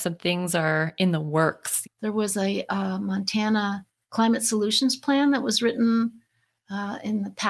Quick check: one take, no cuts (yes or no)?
no